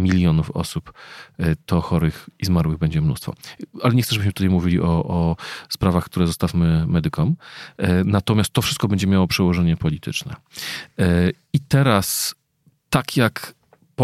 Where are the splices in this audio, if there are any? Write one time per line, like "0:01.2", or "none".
none